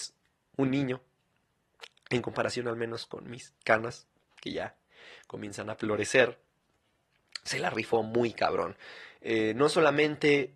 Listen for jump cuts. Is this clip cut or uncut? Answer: uncut